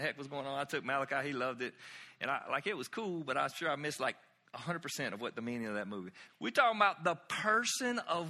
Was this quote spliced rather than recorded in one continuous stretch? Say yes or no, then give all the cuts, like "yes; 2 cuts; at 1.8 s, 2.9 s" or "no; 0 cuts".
yes; 1 cut; at 6.3 s